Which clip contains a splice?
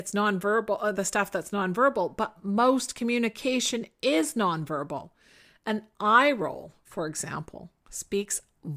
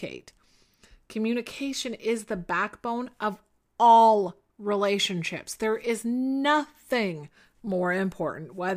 first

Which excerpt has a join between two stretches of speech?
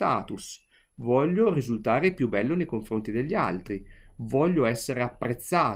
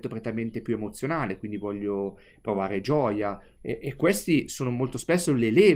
second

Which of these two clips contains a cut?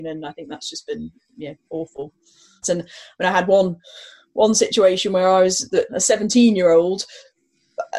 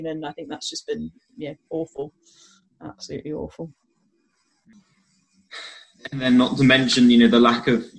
first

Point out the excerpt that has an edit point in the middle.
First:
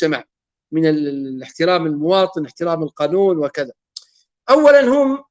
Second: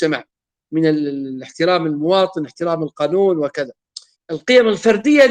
second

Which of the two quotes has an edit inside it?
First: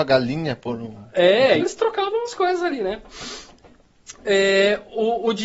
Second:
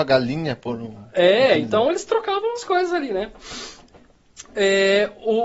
first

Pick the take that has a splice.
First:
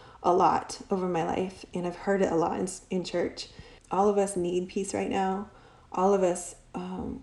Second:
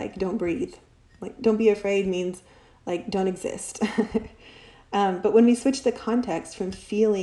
first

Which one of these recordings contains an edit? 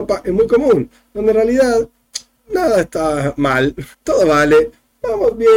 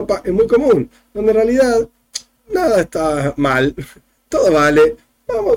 first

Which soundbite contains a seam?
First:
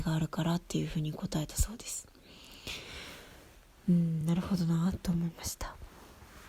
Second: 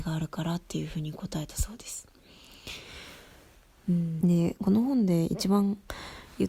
second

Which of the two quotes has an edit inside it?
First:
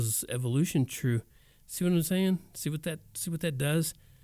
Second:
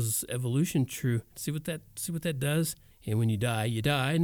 second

